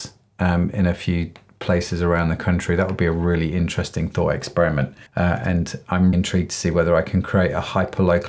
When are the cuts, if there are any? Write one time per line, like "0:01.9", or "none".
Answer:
0:05.1
0:06.1